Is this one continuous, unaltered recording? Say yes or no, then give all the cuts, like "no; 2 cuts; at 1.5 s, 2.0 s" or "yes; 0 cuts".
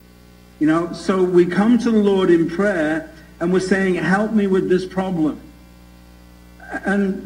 yes; 0 cuts